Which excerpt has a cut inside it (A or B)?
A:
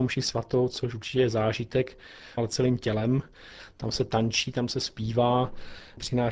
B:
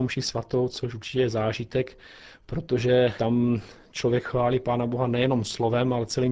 A